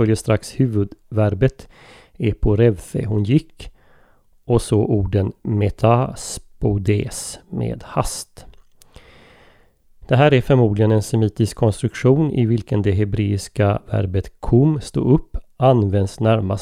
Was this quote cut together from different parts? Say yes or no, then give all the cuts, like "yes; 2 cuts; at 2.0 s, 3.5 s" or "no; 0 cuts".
no; 0 cuts